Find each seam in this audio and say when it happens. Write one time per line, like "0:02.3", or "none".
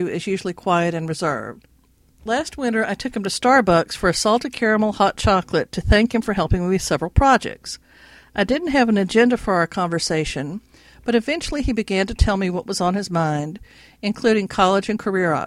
none

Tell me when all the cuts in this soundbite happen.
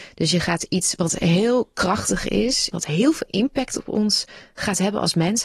0:02.7

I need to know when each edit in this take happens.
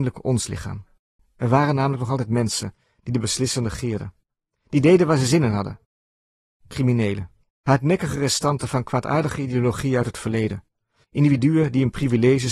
0:01.2
0:07.5
0:11.0

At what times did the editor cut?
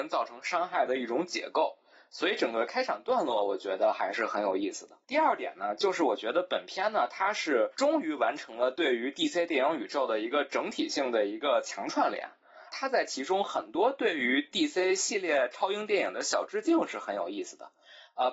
0:05.0
0:12.7

